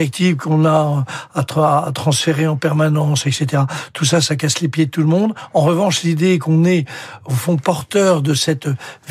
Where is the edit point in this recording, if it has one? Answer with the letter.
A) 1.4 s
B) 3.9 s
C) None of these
C